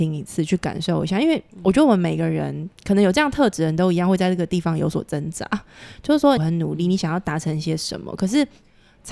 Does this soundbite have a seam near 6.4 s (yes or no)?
yes